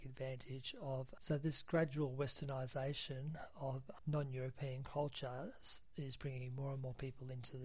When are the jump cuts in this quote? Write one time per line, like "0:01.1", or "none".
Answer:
0:01.2
0:04.0